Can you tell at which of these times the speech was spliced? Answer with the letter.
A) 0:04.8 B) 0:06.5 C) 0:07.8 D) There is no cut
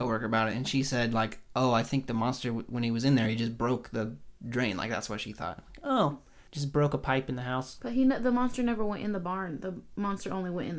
B